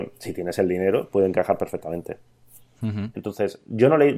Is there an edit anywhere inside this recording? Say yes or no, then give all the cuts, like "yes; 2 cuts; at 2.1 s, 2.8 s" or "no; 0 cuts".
yes; 1 cut; at 3.1 s